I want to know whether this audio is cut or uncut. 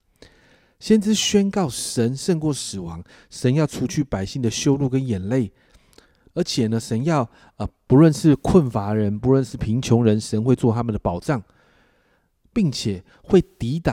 cut